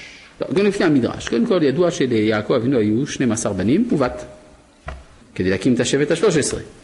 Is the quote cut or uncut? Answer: cut